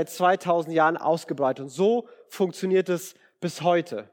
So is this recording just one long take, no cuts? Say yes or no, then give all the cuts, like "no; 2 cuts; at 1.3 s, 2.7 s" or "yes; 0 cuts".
yes; 0 cuts